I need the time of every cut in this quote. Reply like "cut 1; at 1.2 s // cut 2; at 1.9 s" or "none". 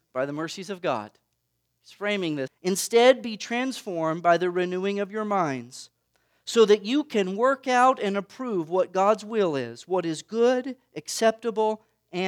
cut 1; at 2.5 s